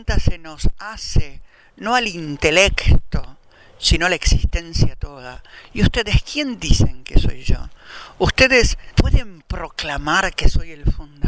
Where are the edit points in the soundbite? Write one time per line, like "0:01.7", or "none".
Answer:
0:08.9